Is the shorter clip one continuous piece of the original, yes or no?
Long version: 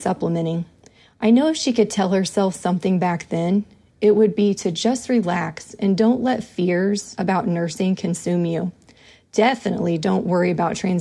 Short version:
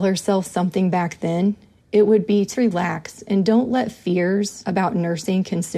no